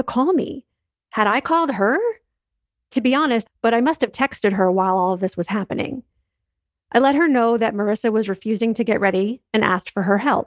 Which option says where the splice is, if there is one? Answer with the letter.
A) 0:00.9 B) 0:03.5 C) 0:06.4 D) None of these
B